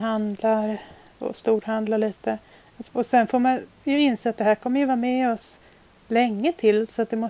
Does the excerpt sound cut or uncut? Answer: cut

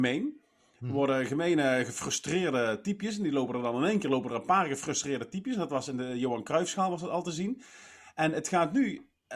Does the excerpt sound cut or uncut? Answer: uncut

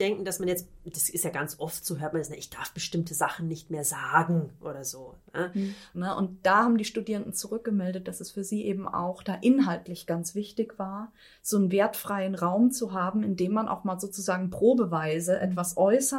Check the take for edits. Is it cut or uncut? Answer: cut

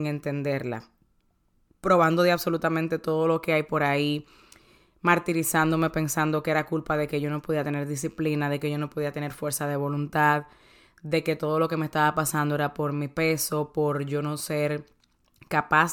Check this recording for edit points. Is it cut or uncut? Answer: uncut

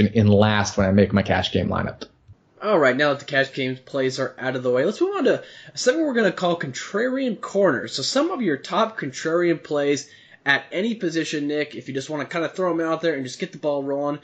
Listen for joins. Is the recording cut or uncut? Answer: uncut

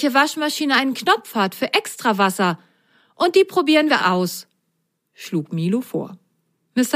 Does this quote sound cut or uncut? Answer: cut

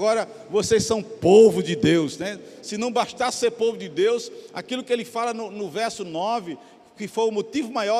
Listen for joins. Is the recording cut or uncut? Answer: uncut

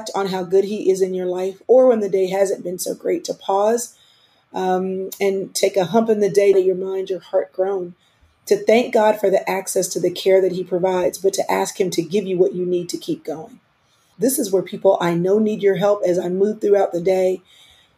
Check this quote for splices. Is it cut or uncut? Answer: cut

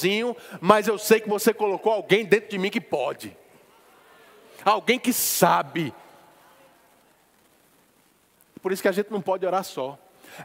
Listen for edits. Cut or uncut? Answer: cut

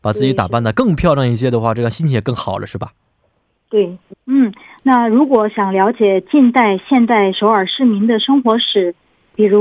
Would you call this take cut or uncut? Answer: cut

